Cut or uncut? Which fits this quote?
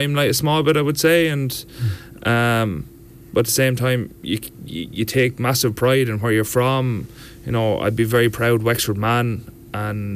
uncut